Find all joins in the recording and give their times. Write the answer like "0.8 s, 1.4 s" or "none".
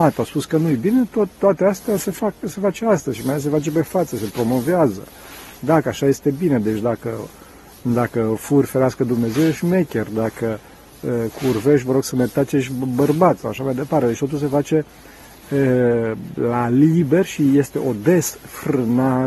none